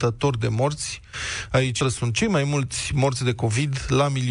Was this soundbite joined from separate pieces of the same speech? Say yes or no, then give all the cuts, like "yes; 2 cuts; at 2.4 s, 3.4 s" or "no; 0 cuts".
yes; 1 cut; at 1.8 s